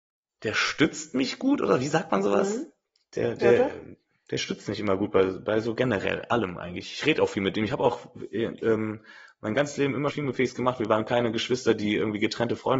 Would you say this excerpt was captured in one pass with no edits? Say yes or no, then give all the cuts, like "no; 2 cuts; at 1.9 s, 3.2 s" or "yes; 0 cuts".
no; 1 cut; at 10.1 s